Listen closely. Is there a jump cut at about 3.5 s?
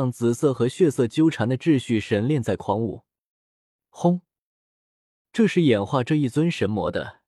no; 1 cut; at 5.2 s

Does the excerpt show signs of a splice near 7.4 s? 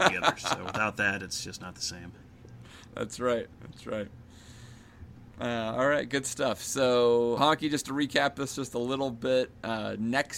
yes; 1 cut; at 7.4 s

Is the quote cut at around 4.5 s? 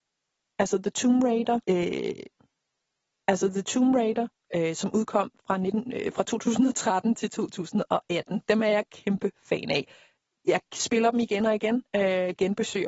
yes; 2 cuts; at 1.6 s, 4.5 s

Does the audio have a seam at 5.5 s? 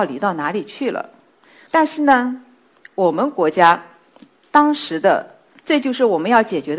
yes; 1 cut; at 5.5 s

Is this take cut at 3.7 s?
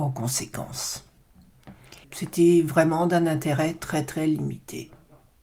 no; 1 cut; at 2.0 s

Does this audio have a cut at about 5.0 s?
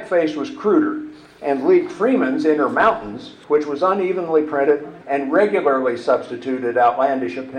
yes; 1 cut; at 5.0 s

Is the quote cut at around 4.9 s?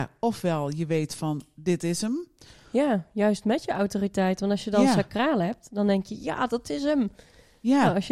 no; 0 cuts

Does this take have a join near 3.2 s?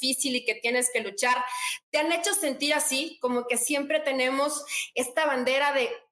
no; 0 cuts

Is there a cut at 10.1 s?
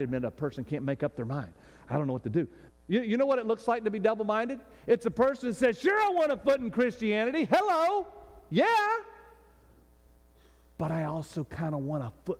no; 1 cut; at 2.7 s

